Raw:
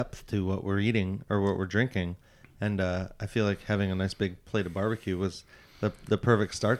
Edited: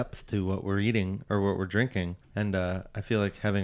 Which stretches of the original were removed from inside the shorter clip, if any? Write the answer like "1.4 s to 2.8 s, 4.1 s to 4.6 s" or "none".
2.2 s to 2.5 s